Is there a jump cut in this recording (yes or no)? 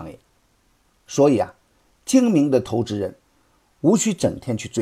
no